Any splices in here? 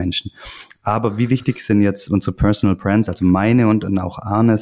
no; 0 cuts

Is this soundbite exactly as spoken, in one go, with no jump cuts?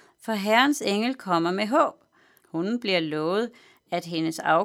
no; 1 cut; at 2.4 s

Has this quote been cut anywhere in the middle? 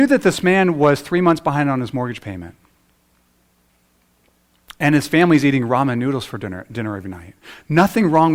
no; 0 cuts

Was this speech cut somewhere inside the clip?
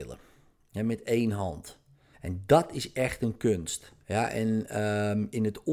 yes; 2 cuts; at 2.1 s, 4.0 s

